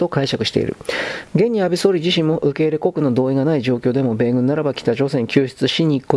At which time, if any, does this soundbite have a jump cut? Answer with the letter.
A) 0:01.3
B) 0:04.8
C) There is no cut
A